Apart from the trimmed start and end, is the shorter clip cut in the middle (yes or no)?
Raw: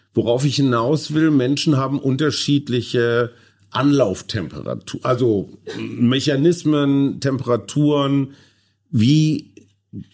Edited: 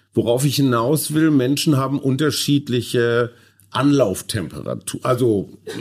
no